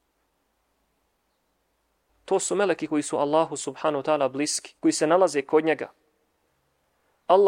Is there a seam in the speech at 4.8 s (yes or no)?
yes